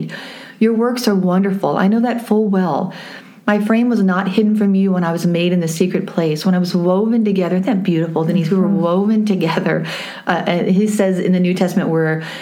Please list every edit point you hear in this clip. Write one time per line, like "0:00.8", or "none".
none